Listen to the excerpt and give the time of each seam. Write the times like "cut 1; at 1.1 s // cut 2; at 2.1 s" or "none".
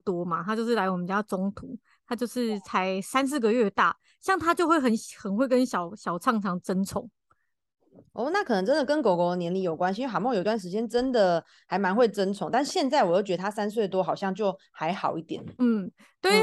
none